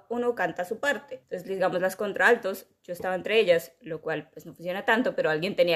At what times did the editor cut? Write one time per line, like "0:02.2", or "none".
none